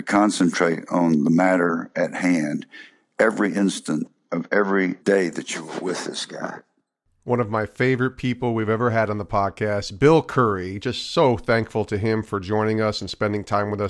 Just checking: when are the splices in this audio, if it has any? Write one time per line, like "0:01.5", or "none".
0:05.0